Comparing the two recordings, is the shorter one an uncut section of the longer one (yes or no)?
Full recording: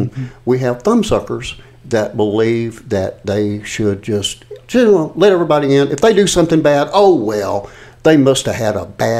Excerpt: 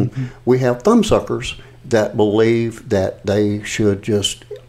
yes